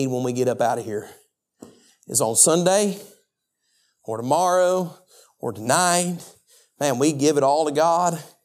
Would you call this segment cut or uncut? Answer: uncut